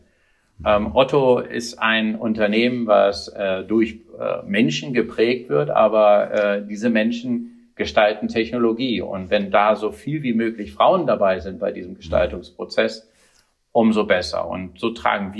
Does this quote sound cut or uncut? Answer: uncut